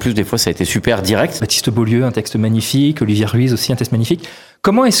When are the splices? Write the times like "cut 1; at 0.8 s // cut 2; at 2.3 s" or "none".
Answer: cut 1; at 1.4 s